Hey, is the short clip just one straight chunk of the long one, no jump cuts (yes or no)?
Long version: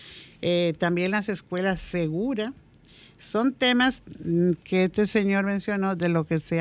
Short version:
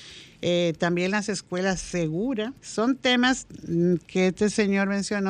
no